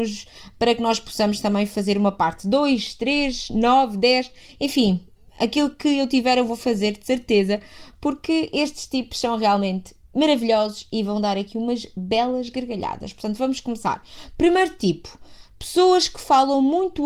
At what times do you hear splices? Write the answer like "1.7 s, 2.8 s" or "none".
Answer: none